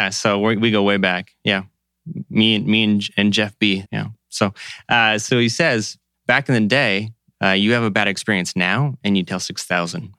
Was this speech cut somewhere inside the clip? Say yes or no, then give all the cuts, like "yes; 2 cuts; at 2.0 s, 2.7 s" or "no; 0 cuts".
yes; 2 cuts; at 3.8 s, 7.3 s